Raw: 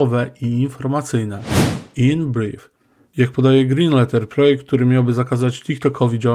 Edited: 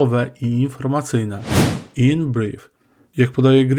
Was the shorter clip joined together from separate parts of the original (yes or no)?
no